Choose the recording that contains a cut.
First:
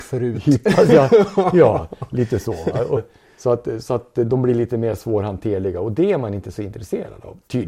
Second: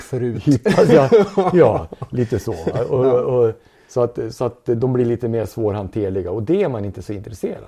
first; 1 cut; at 3.0 s

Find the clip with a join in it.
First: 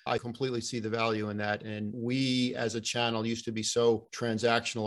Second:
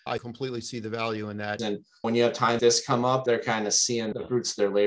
second; 2 cuts; at 1.6 s, 2.6 s

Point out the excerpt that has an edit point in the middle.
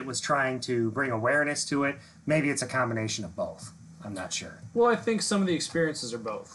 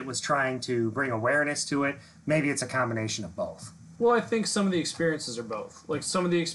second; 1 cut; at 4.0 s

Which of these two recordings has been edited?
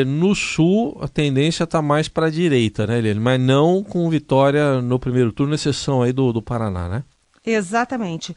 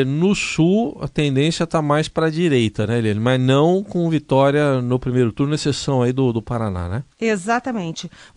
second; 1 cut; at 7.1 s

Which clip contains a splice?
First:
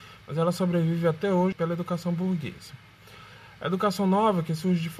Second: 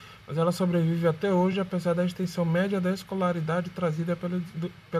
first; 1 cut; at 1.5 s

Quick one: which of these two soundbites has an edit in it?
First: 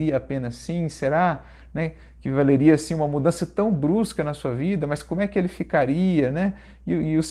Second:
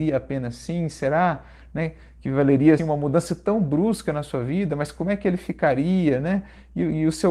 second; 1 cut; at 2.8 s

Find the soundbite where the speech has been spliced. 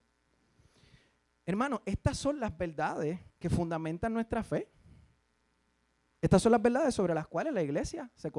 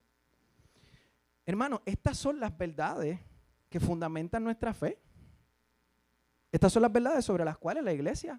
first; 1 cut; at 3.3 s

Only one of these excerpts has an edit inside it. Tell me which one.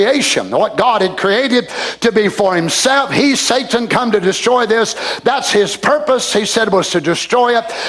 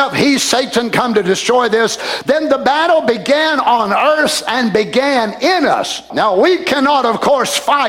second; 2 cuts; at 2.2 s, 6.1 s

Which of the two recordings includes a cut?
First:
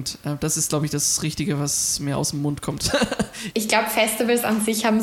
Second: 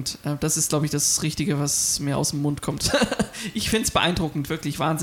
first; 1 cut; at 3.5 s

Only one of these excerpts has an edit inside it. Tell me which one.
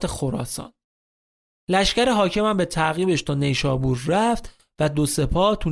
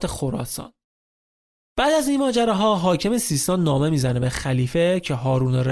second; 1 cut; at 1.5 s

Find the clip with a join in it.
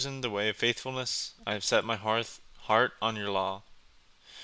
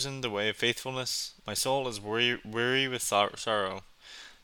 second; 1 cut; at 1.4 s

